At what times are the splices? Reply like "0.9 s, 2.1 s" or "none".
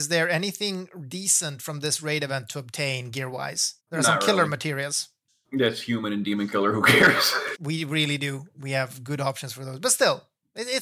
3.8 s, 7.5 s